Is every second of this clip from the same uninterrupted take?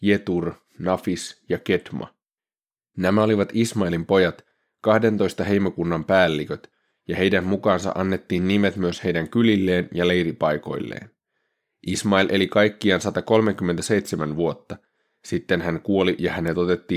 yes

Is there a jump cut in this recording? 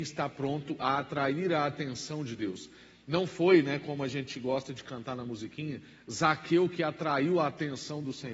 no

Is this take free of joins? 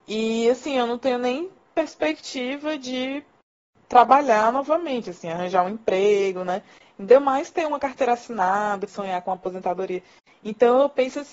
no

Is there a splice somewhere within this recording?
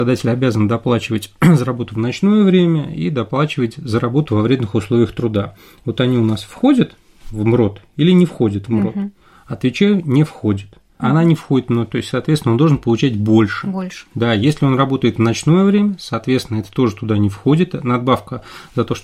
yes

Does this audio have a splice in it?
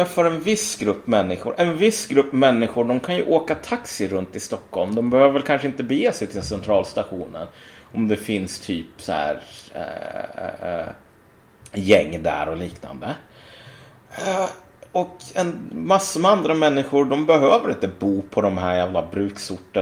no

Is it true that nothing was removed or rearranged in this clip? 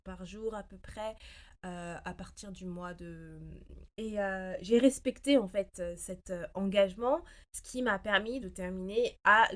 no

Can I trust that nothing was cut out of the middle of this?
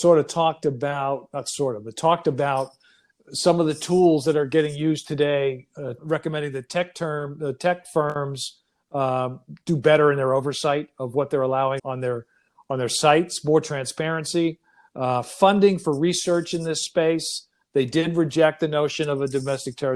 no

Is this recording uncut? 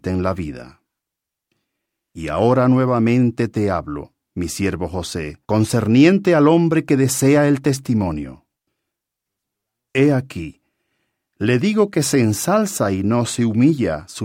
no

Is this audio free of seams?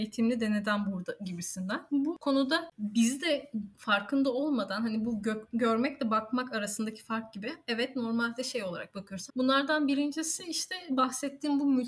no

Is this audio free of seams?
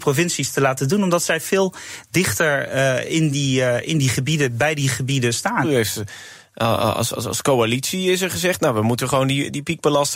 no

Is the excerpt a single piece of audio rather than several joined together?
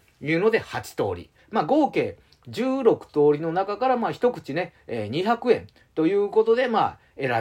no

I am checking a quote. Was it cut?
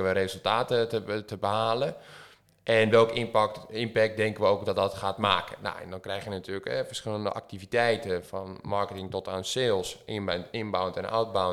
no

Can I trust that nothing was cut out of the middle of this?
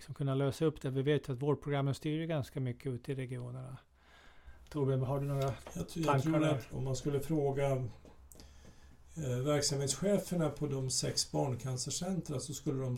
no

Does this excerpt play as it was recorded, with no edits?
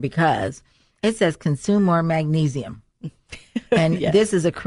yes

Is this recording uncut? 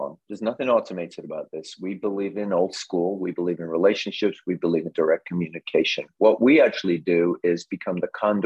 yes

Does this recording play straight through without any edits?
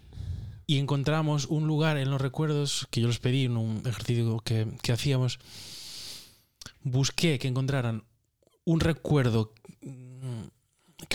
yes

